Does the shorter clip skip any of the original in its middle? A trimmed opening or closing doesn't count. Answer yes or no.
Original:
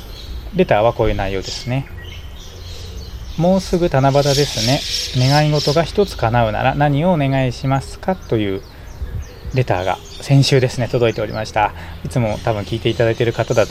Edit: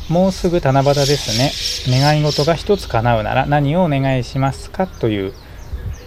no